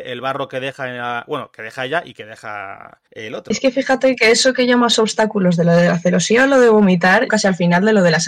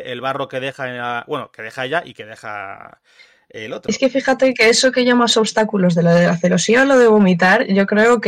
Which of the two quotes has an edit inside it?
first; 2 cuts; at 3.1 s, 7.3 s

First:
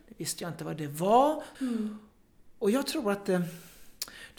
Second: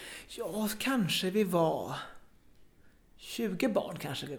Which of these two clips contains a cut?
first; 1 cut; at 1.5 s

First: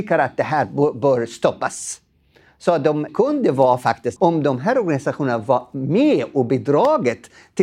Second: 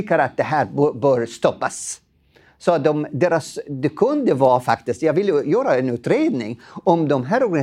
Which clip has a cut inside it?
first; 2 cuts; at 3.1 s, 4.2 s

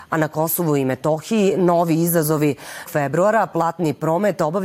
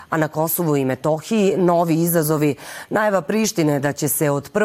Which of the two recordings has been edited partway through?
first; 1 cut; at 2.9 s

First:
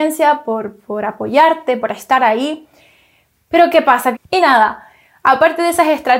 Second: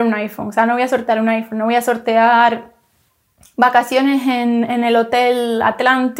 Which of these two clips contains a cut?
first; 1 cut; at 4.1 s

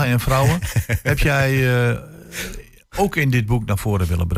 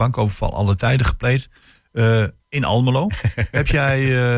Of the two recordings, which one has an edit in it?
second; 1 cut; at 3.1 s

